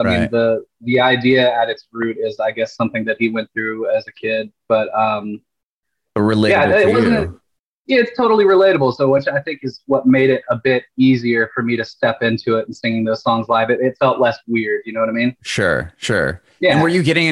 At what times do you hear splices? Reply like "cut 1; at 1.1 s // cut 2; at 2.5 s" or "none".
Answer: none